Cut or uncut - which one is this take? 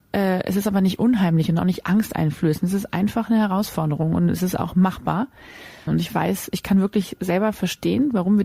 cut